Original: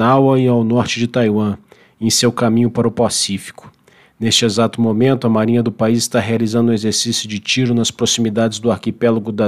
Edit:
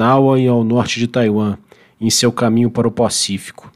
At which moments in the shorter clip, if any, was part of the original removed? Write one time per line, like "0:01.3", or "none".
none